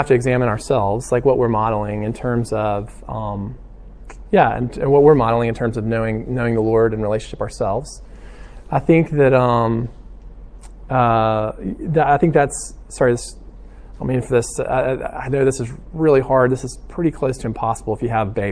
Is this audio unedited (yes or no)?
yes